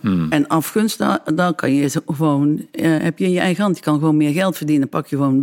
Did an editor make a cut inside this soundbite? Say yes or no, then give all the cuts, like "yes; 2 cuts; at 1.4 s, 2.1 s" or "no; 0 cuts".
no; 0 cuts